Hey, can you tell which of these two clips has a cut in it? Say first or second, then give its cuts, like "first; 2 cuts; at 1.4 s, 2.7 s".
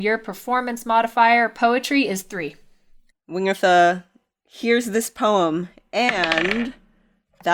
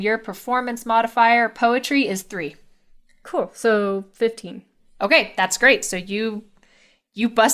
first; 1 cut; at 3.1 s